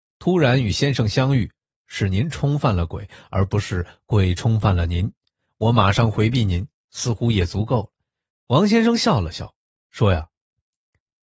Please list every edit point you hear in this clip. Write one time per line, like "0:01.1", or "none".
0:08.3